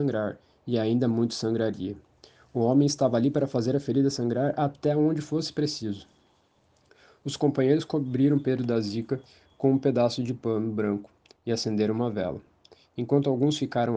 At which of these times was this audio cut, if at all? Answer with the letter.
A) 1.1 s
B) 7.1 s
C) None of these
C